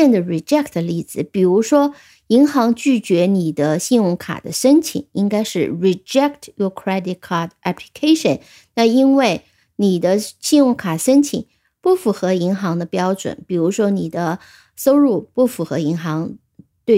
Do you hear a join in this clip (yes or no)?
no